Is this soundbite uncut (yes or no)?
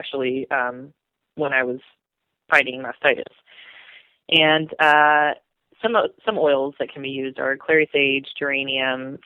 yes